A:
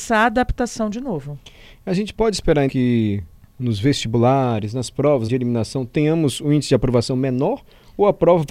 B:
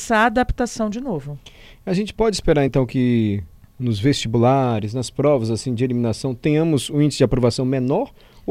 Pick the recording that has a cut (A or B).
A